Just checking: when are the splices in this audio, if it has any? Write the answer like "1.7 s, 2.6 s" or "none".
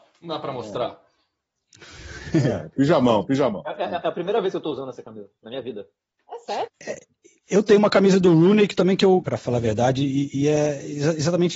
6.7 s, 9.2 s